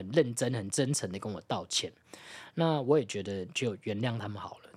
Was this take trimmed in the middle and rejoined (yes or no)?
no